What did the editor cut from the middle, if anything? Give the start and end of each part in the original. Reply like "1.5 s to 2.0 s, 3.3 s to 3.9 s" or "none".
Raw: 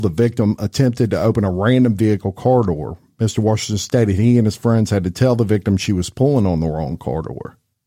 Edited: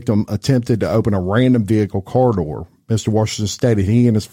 none